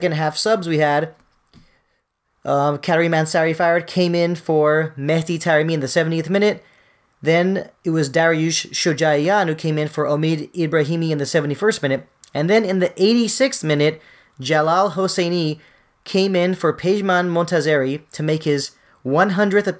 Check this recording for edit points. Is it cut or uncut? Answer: uncut